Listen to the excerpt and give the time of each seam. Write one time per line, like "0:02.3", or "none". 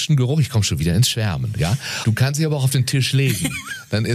0:02.0